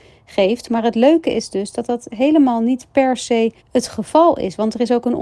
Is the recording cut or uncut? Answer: cut